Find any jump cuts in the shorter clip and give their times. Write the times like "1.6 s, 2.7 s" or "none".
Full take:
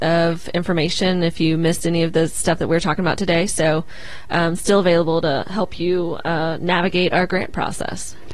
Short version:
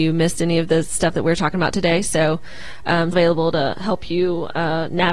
3.1 s

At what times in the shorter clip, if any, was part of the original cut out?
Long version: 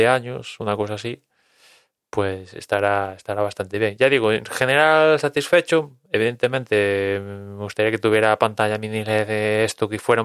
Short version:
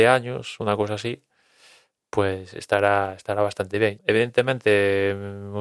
4.0 s

